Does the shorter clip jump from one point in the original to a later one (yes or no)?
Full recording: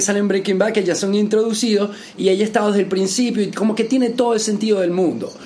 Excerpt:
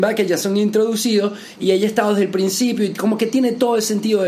no